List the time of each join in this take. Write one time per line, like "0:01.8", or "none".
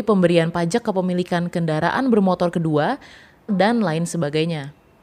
0:03.5